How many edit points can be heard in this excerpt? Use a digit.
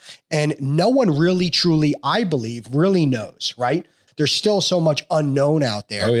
1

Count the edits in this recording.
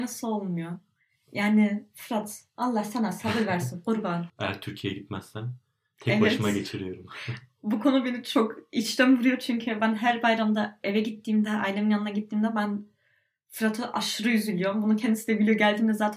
1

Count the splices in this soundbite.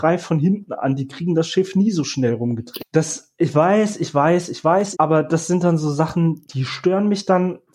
3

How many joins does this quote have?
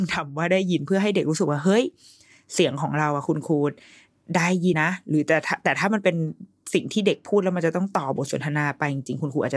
1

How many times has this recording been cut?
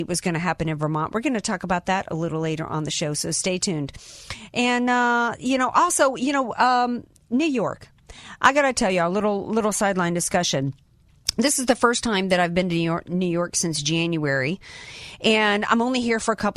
0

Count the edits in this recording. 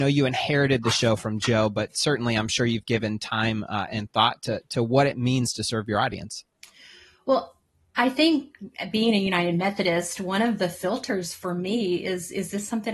0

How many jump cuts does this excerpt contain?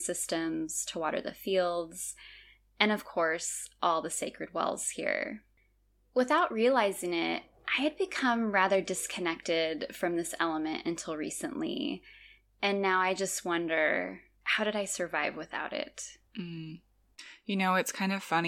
1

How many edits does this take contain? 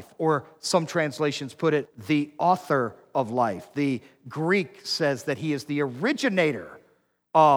0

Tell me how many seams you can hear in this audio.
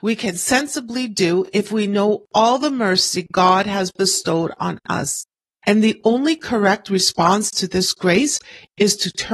1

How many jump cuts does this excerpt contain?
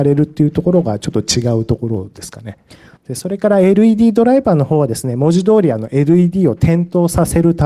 1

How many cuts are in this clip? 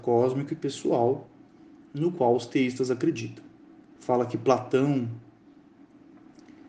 1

